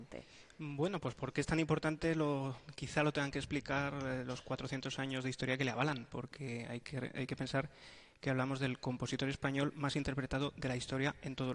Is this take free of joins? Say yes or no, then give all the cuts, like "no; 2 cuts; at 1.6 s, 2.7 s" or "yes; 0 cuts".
yes; 0 cuts